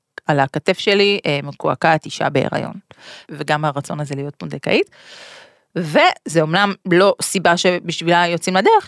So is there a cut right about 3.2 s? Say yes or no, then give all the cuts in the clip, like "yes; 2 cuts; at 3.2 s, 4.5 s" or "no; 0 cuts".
yes; 1 cut; at 3.2 s